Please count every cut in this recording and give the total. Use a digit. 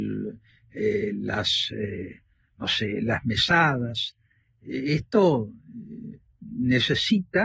0